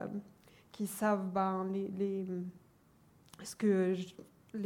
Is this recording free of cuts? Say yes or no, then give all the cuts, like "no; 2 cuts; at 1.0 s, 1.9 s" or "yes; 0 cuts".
yes; 0 cuts